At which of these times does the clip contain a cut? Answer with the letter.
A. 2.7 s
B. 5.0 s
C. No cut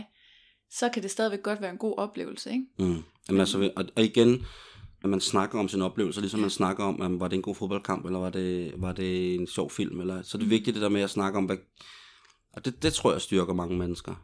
B